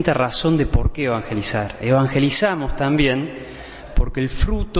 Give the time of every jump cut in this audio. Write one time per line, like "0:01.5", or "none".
none